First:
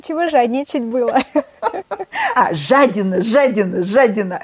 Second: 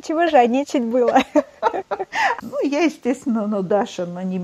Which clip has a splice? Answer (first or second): second